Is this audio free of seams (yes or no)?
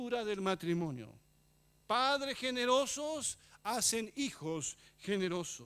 no